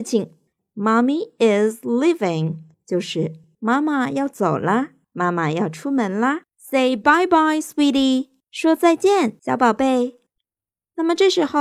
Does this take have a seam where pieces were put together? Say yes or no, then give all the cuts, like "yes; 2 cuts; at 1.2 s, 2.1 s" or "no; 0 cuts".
no; 0 cuts